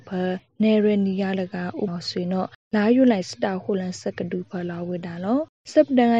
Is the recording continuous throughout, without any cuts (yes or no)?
no